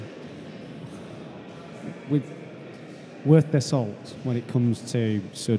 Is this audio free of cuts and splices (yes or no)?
yes